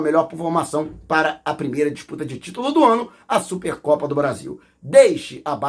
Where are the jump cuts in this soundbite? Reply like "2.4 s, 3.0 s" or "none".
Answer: 4.7 s

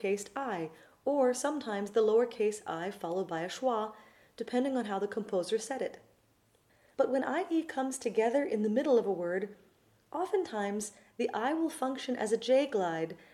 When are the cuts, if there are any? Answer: none

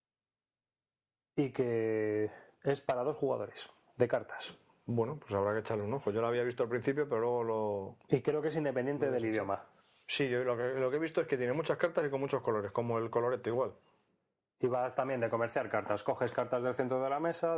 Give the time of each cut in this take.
none

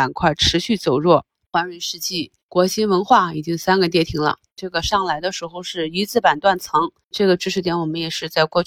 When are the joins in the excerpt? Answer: 1.5 s

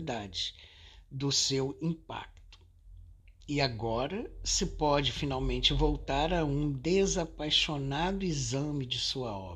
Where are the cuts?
none

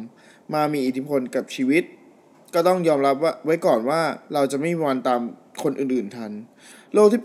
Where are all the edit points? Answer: none

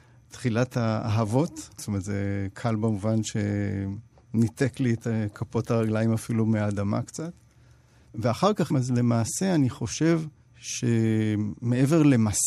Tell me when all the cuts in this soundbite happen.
1.8 s, 8.7 s

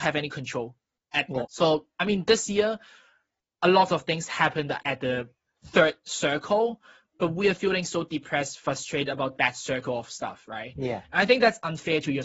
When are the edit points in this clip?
1.4 s, 4.8 s

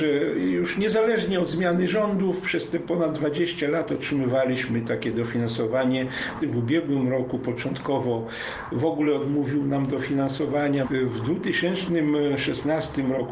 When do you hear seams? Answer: 6.4 s, 10.8 s

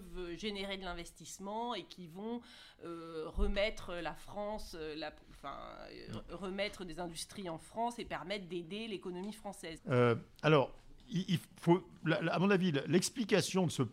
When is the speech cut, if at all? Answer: 9.8 s

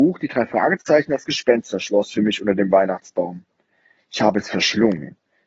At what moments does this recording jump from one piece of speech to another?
none

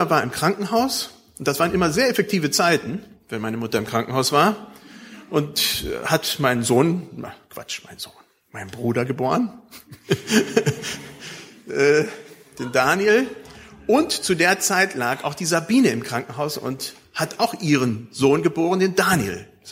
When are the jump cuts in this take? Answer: none

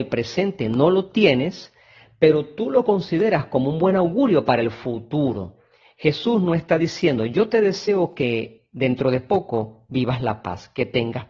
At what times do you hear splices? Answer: none

